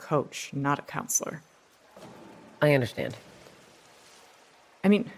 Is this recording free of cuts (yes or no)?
yes